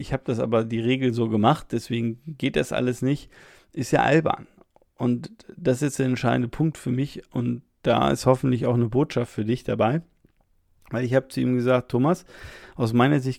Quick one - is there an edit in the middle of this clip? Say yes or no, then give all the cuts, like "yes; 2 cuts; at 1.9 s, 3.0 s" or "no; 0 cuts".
no; 0 cuts